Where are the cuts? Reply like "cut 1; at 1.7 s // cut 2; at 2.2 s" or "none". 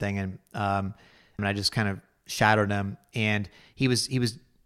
cut 1; at 1.4 s